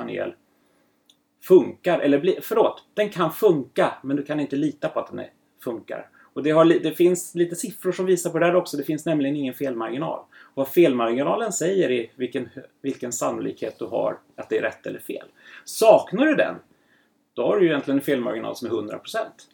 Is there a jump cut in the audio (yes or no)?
no